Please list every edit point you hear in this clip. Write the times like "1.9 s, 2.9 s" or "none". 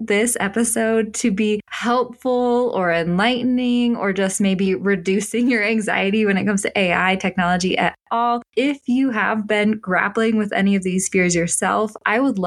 none